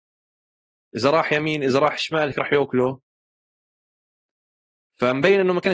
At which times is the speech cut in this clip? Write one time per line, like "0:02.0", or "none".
0:02.3